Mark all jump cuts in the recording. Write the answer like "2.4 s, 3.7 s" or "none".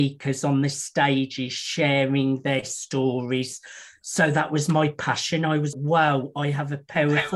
5.7 s